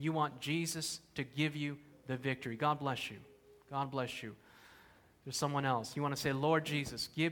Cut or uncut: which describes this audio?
uncut